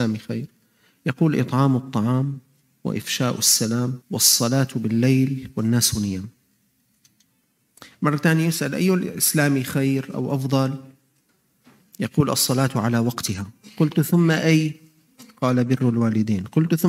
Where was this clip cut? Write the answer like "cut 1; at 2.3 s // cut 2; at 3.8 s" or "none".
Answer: cut 1; at 4.0 s